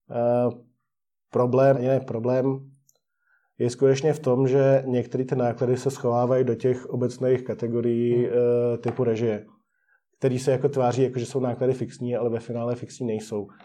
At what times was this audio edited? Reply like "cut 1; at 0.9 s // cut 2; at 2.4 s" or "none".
cut 1; at 1.7 s